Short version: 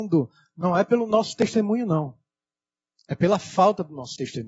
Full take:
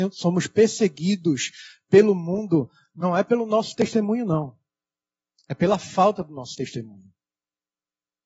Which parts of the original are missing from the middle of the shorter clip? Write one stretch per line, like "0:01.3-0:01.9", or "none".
none